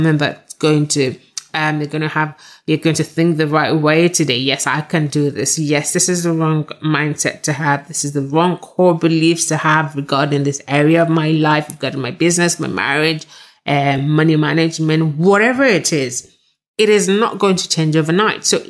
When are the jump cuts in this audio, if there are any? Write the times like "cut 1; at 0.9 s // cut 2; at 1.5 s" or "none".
none